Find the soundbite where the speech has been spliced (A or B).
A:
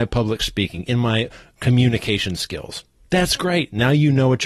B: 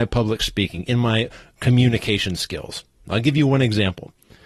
B